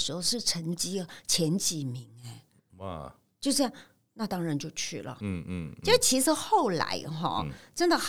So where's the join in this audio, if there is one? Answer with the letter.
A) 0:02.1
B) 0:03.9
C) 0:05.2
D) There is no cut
C